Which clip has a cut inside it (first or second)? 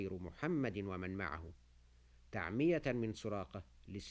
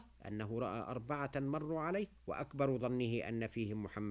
second